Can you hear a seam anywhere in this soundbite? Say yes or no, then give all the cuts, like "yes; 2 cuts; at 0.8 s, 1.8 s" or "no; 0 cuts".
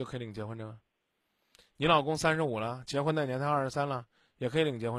no; 0 cuts